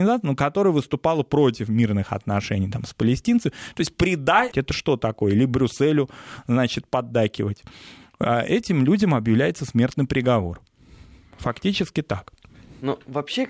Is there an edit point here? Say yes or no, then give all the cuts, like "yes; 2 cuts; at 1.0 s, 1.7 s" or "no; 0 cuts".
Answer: yes; 1 cut; at 4.5 s